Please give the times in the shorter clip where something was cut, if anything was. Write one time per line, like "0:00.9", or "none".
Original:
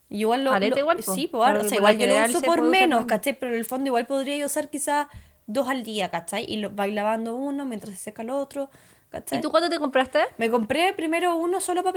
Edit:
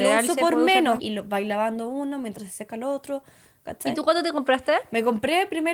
0:01.0